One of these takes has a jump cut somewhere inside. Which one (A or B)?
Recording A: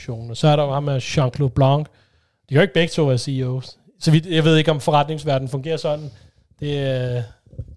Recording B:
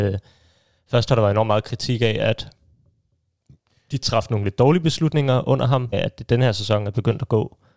B